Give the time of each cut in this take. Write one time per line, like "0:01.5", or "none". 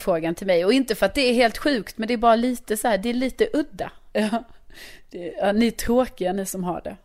0:04.1